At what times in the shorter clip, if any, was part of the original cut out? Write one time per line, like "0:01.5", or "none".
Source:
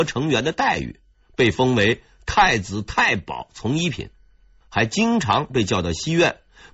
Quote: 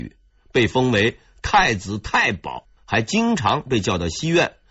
0:02.6